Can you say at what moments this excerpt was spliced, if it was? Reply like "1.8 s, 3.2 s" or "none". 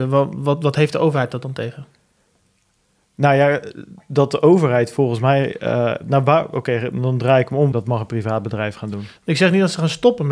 7.7 s